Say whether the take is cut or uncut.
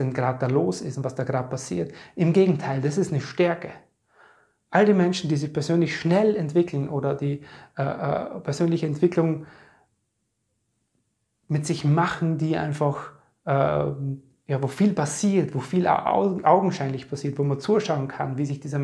uncut